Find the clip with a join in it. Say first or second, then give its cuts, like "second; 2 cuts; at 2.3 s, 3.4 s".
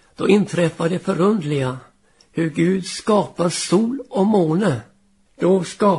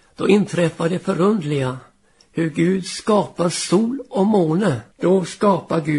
second; 1 cut; at 4.9 s